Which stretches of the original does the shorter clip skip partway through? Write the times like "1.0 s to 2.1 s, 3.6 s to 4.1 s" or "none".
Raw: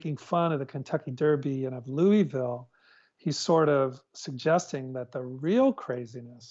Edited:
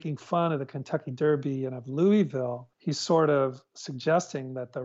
2.7 s to 3.1 s